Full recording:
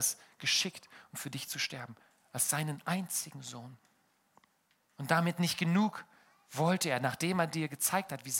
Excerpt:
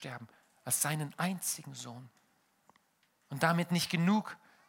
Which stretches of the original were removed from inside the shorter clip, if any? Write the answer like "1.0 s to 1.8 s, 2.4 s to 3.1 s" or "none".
none

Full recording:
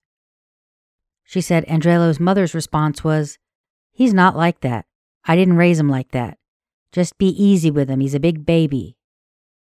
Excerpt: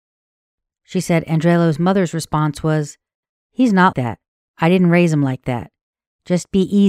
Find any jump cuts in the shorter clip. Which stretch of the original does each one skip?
4.3 s to 4.6 s

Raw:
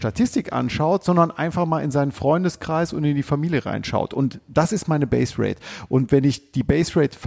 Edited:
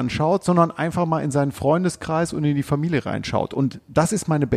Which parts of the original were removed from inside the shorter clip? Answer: none

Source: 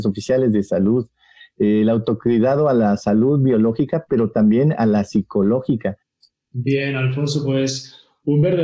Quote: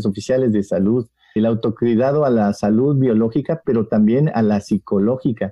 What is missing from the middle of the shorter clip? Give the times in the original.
1.4 s to 1.8 s

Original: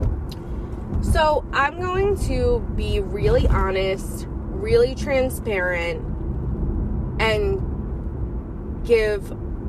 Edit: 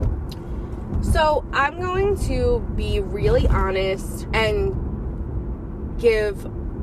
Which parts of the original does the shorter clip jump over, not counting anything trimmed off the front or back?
4.3 s to 7.2 s

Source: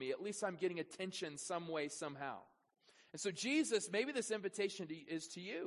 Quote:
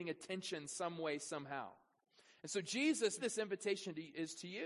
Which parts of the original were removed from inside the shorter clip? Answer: 3.9 s to 4.1 s

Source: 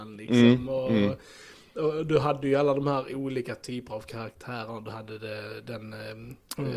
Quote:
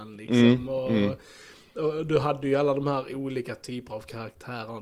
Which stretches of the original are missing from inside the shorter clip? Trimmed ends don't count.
none

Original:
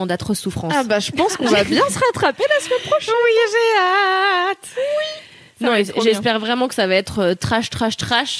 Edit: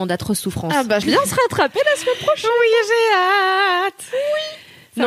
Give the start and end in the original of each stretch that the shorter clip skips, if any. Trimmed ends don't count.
1.0 s to 1.7 s

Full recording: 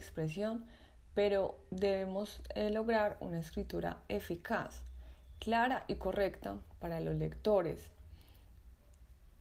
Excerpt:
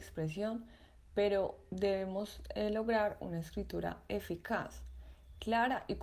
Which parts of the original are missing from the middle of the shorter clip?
none

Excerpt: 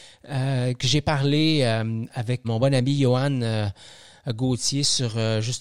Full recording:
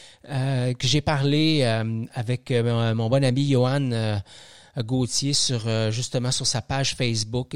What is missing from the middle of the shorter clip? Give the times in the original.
2.4 s to 2.9 s

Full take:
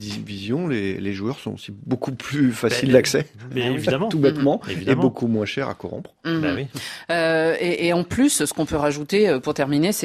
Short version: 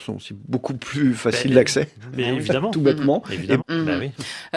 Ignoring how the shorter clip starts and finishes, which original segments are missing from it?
5.0 s to 6.1 s

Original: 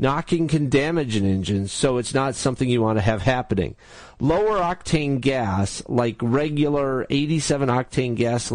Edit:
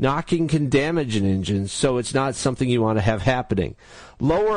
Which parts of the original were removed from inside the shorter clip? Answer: none

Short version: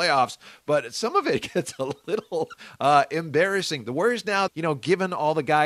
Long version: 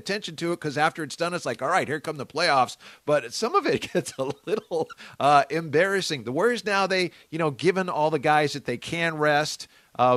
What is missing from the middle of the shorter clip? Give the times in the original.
6.9 s to 7.2 s

